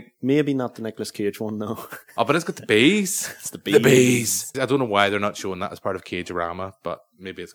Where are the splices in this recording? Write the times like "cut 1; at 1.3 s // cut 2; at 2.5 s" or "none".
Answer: cut 1; at 4.5 s